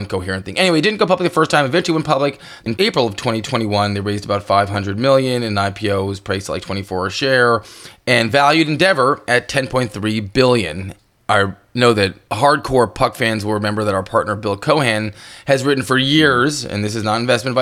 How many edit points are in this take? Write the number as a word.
zero